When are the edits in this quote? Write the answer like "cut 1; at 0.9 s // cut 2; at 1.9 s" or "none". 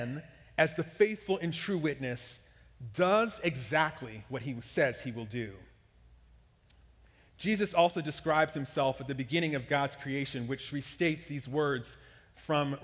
none